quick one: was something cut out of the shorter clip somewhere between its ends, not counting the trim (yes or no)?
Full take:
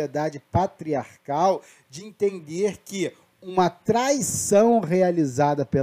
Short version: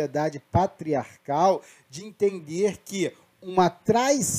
no